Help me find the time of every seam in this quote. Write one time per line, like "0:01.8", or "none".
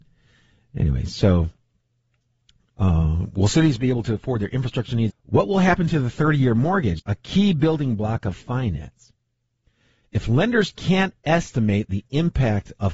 0:05.1
0:07.0

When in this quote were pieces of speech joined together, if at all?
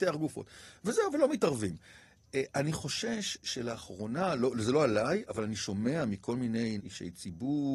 0:06.8

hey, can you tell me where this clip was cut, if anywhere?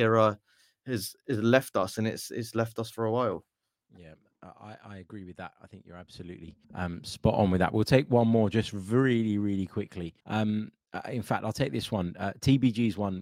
0:06.6
0:10.2

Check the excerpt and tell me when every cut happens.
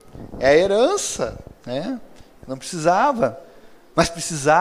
none

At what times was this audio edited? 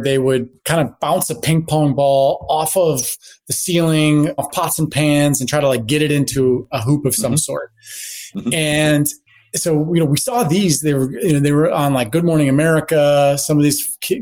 0:04.4

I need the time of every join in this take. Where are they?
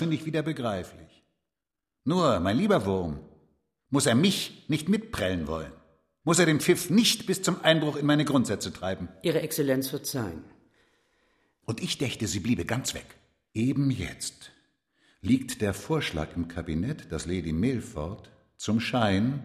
0:06.2
0:11.6
0:13.5

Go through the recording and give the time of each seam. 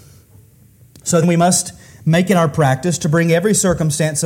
0:01.2

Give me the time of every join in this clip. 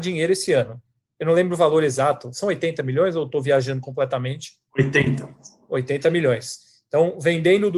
none

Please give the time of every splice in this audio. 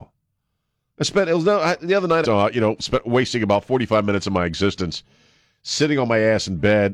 0:02.2

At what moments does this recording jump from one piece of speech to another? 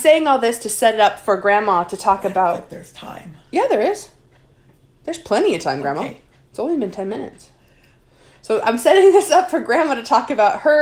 none

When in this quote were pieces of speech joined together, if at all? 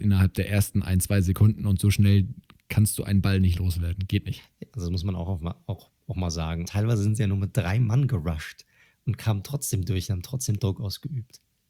0:04.7
0:06.6

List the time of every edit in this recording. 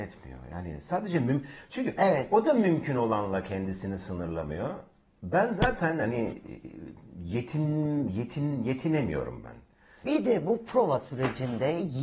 0:10.0

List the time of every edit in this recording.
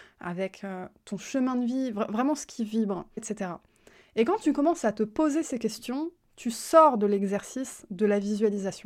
0:03.2

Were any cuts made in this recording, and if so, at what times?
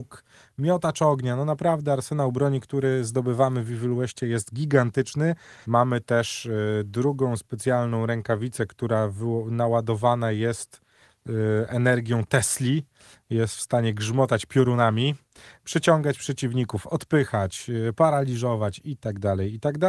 0:05.6
0:18.0

